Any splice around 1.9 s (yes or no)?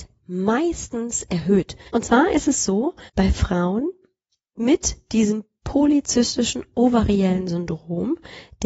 yes